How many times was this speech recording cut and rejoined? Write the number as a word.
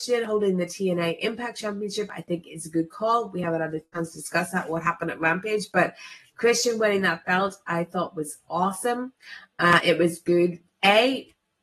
zero